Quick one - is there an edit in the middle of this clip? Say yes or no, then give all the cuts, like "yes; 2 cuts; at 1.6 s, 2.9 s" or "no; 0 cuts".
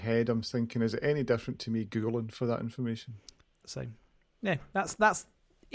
yes; 1 cut; at 3.6 s